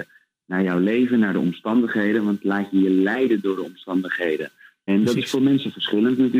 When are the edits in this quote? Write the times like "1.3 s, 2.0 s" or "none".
4.9 s